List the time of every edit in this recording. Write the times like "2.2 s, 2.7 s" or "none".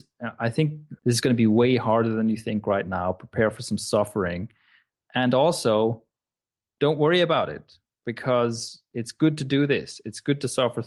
1.0 s